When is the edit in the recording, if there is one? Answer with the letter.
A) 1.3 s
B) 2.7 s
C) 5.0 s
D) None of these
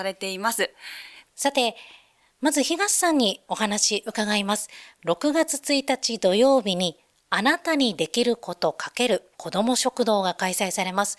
A